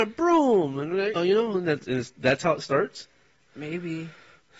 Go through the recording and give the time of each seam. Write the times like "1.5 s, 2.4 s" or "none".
1.2 s